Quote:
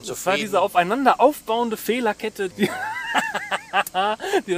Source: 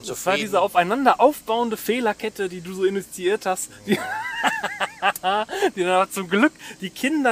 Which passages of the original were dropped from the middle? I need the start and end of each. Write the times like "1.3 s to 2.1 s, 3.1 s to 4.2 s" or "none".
2.5 s to 3.8 s